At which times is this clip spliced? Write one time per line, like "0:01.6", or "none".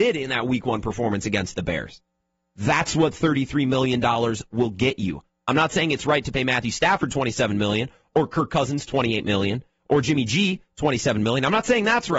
none